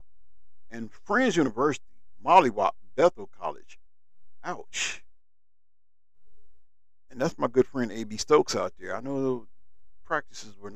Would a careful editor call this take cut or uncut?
uncut